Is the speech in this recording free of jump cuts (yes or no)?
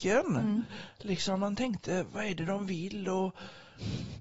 yes